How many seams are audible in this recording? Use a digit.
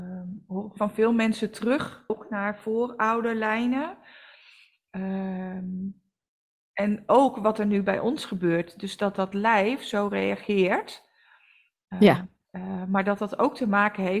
2